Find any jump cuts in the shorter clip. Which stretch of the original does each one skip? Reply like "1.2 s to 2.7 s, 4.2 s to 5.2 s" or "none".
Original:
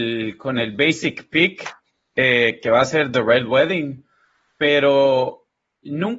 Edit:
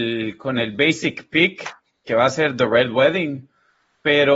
2.1 s to 2.6 s